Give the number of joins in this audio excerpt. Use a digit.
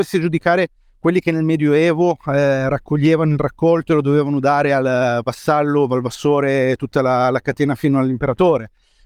0